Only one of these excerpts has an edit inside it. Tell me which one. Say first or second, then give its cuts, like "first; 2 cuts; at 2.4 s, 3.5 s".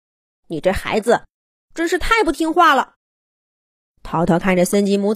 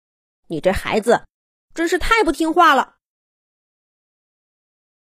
first; 1 cut; at 2.9 s